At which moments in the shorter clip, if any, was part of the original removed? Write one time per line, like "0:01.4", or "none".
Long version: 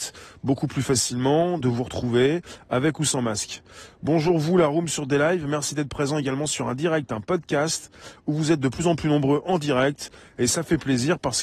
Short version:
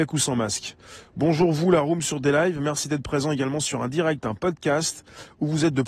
none

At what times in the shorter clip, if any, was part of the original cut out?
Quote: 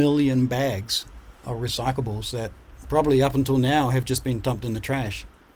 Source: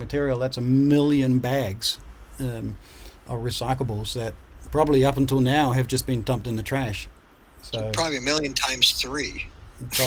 0:01.4

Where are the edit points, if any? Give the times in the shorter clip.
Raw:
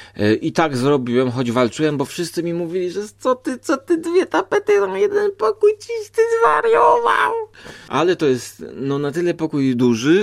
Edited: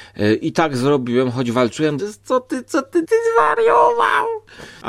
0:02.0
0:03.0

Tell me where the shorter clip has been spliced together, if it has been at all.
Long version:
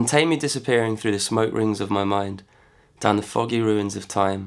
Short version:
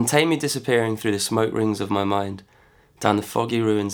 none

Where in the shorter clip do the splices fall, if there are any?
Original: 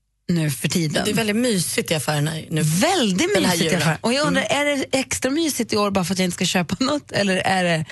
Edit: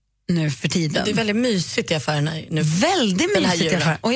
none

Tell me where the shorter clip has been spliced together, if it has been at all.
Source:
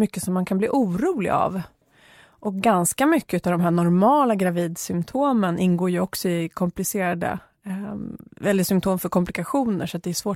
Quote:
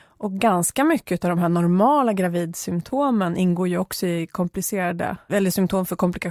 0:05.3

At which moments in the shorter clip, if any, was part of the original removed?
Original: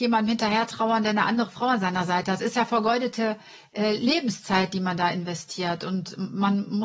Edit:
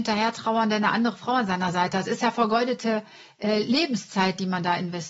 none

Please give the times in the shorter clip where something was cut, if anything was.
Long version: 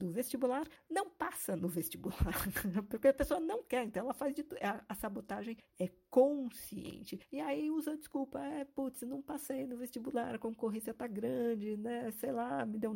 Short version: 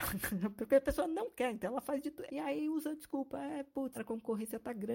0:02.3
0:03.9

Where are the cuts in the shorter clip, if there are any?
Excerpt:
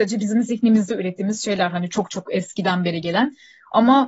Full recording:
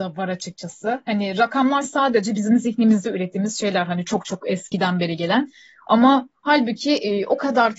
none

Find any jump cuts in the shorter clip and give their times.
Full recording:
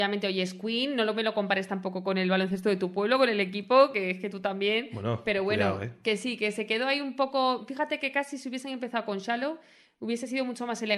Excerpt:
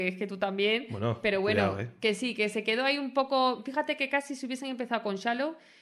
none

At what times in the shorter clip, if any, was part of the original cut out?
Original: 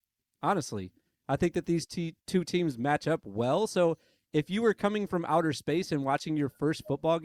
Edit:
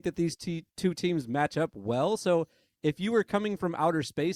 none

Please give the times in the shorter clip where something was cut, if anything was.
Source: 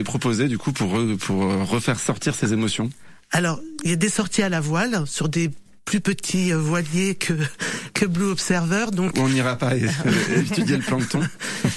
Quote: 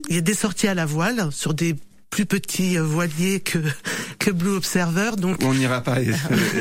none

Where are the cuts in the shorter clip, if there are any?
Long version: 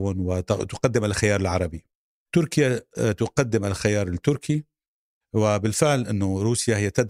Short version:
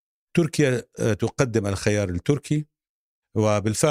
none

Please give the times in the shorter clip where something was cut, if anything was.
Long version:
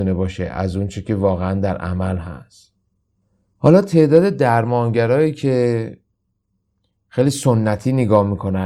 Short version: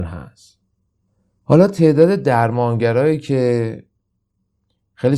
none

